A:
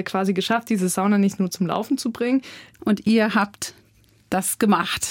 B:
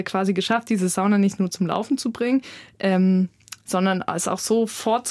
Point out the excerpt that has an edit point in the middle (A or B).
A